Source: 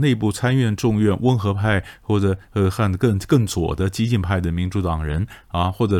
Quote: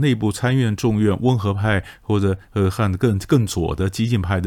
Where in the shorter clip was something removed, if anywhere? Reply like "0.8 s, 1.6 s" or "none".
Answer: none